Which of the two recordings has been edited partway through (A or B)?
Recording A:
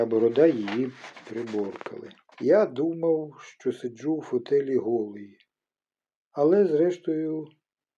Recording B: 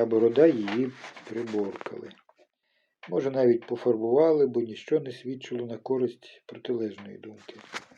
A